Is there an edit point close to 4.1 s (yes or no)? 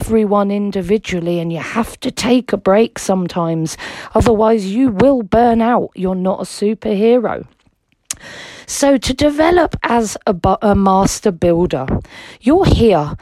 no